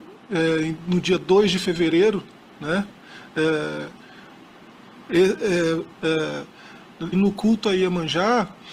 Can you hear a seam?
yes; 2 cuts; at 5.9 s, 7.1 s

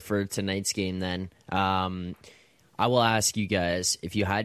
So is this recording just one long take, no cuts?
yes; 0 cuts

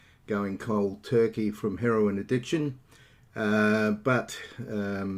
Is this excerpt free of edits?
yes; 0 cuts

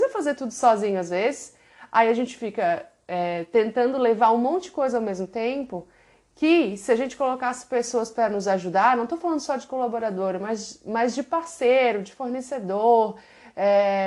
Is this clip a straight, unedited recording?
yes; 0 cuts

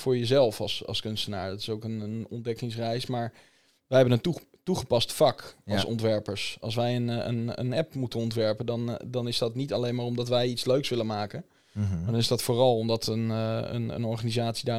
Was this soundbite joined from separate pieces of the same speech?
no; 0 cuts

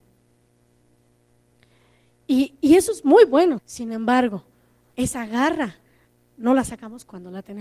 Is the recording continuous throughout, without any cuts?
no; 1 cut; at 3.6 s

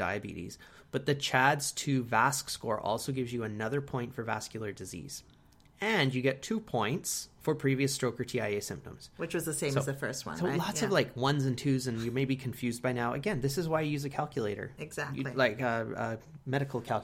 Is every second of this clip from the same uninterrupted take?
yes; 0 cuts

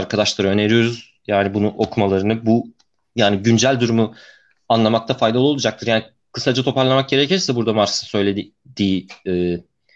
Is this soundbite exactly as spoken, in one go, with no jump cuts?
yes; 0 cuts

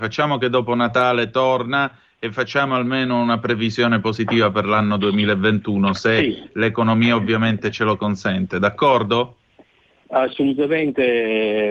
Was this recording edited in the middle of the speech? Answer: no; 0 cuts

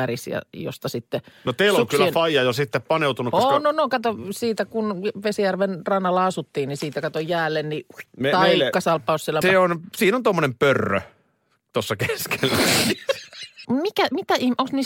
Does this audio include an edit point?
yes; 3 cuts; at 8.1 s, 9.4 s, 13.6 s

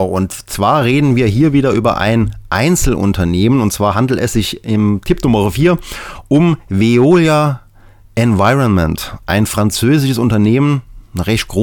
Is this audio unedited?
yes; 0 cuts

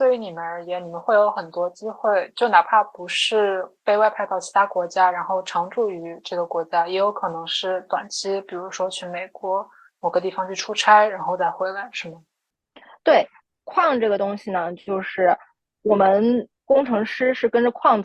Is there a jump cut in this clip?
no; 0 cuts

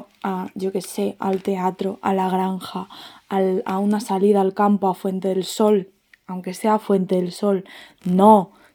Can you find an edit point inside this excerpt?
no; 0 cuts

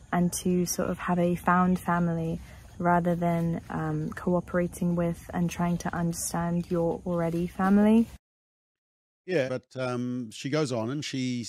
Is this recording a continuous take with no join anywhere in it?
no; 1 cut; at 9.5 s

